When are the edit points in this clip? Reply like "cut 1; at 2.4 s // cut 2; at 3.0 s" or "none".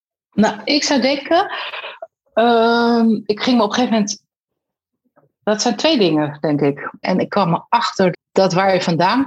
cut 1; at 7.0 s // cut 2; at 8.1 s